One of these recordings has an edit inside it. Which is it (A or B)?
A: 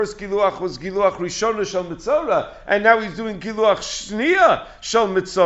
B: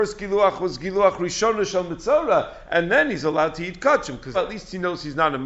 B